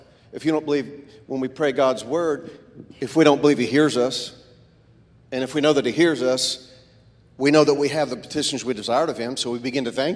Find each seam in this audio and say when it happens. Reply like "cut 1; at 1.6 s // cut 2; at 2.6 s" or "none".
none